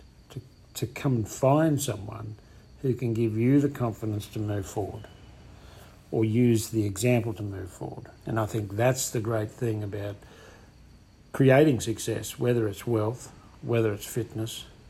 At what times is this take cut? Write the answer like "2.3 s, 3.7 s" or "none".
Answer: 8.2 s